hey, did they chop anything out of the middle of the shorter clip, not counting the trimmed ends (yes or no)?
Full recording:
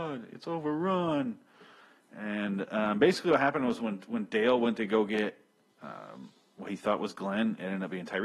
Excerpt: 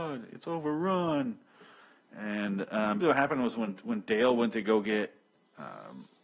yes